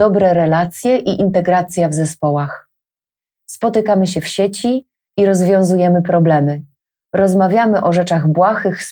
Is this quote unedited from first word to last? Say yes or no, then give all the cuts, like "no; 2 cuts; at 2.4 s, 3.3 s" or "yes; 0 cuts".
yes; 0 cuts